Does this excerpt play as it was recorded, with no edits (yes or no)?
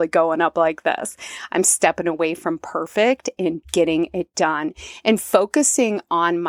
no